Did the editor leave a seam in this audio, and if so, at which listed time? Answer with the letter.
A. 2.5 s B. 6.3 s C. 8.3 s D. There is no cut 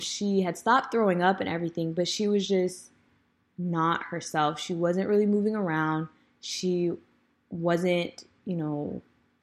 D